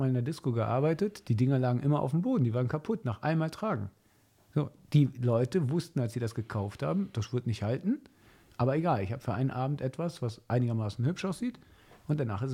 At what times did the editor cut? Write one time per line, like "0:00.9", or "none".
none